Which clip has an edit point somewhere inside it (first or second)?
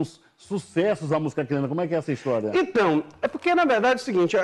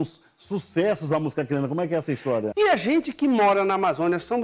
second